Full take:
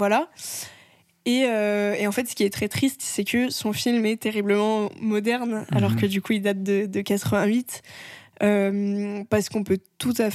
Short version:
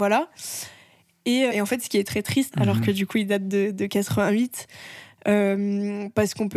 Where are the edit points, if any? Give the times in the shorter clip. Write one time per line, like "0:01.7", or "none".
0:01.5
0:02.5